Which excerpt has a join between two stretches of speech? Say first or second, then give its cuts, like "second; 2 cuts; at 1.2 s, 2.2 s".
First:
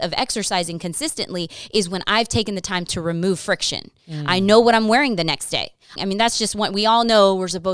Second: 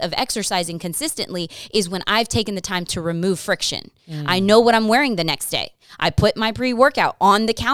first; 1 cut; at 6.0 s